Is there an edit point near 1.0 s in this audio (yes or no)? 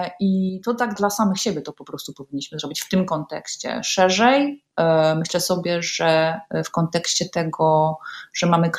yes